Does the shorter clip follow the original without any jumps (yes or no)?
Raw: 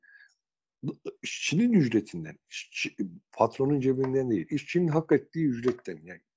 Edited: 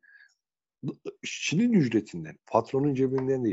no